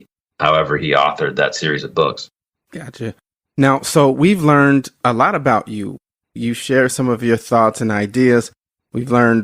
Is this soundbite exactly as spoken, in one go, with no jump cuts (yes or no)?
yes